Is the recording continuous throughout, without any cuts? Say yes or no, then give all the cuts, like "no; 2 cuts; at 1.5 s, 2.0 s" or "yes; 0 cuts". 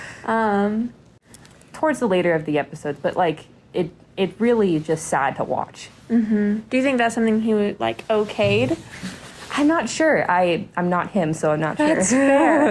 no; 2 cuts; at 1.7 s, 6.7 s